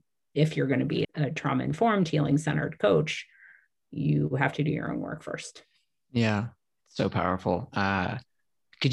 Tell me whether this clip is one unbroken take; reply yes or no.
no